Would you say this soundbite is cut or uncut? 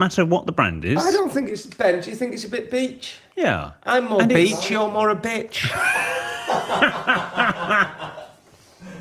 cut